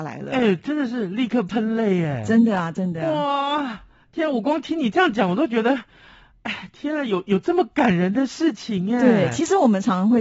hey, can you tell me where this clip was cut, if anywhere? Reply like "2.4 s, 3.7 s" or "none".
none